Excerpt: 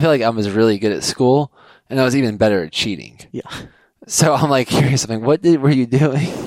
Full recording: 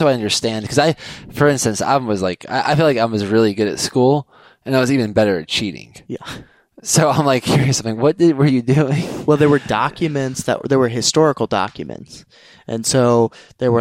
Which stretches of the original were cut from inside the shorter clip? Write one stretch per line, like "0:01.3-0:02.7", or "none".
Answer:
none